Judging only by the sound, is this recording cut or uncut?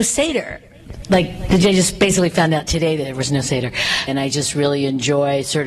cut